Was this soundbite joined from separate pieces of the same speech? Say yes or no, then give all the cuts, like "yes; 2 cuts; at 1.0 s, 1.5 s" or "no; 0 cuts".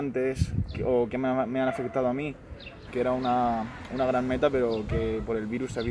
yes; 1 cut; at 2.9 s